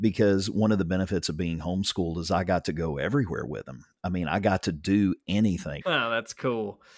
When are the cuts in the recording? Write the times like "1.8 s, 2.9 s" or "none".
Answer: 5.8 s